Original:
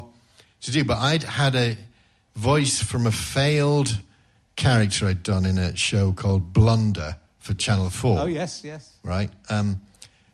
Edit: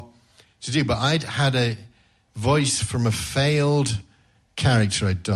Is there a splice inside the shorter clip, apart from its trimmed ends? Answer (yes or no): no